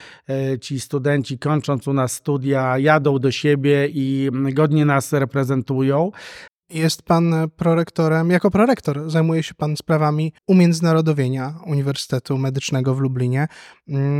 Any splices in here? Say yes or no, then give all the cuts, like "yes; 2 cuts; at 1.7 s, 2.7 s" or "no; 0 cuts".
yes; 2 cuts; at 6.5 s, 10.4 s